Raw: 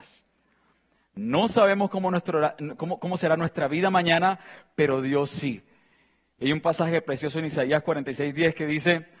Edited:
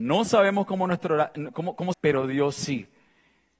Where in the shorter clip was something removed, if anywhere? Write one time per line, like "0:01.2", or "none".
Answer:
0:01.9

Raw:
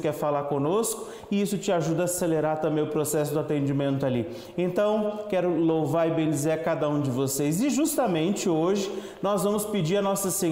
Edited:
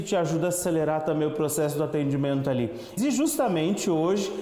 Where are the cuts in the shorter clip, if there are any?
0:03.0

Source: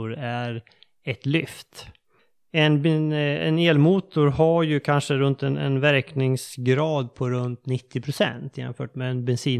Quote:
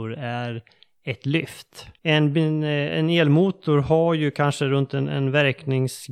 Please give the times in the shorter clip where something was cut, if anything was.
0:02.0

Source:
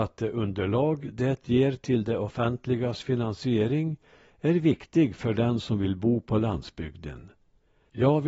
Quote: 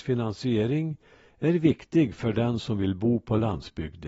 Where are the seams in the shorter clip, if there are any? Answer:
none

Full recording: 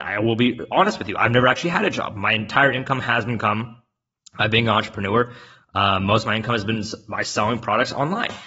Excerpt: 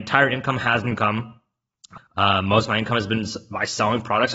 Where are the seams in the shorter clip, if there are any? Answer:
0:02.0

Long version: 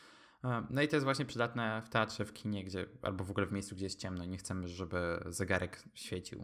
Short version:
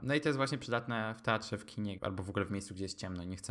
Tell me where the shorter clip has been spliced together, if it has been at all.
0:02.0

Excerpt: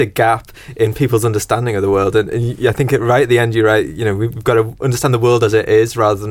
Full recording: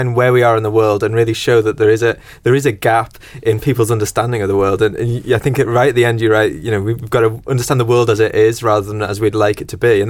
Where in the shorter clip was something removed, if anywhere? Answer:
none

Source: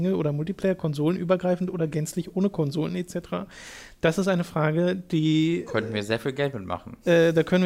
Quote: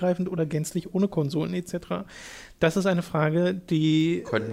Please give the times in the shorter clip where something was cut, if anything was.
none

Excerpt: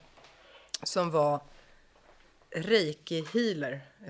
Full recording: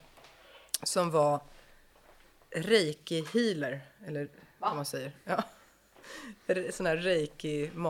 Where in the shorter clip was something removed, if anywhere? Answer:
none

